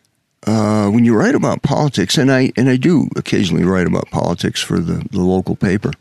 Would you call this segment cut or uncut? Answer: uncut